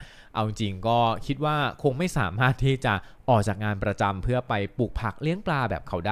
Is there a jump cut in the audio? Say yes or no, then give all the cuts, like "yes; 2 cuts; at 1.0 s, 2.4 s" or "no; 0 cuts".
no; 0 cuts